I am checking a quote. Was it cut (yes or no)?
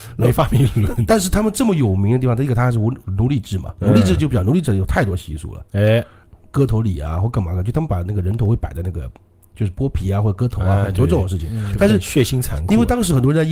no